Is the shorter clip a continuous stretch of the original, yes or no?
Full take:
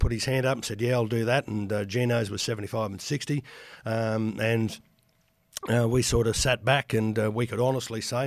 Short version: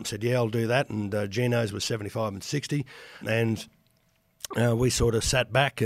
no